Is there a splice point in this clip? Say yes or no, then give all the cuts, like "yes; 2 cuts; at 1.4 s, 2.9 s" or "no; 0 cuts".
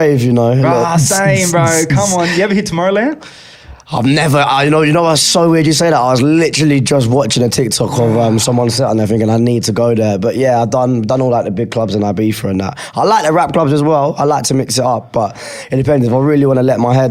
no; 0 cuts